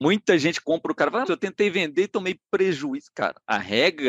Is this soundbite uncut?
no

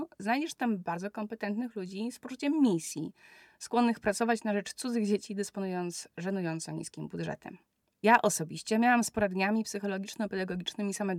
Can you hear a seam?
no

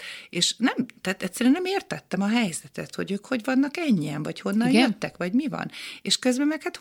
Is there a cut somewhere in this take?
no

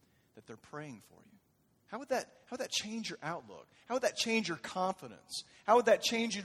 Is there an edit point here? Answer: no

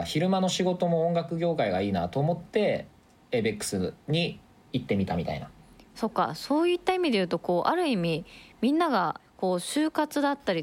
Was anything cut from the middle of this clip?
no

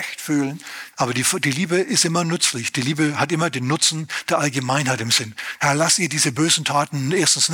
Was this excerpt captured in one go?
no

